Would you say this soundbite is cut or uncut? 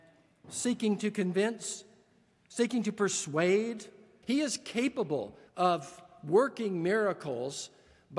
cut